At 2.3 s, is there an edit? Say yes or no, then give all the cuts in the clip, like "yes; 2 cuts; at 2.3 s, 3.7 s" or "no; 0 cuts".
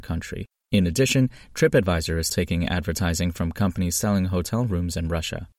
yes; 1 cut; at 2.3 s